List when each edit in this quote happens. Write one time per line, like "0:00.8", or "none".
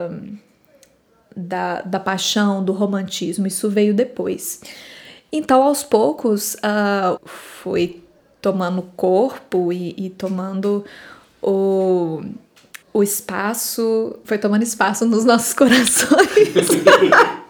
0:07.2
0:12.8
0:14.2